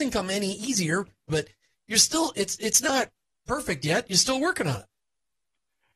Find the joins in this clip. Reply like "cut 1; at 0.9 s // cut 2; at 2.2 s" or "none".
cut 1; at 1.3 s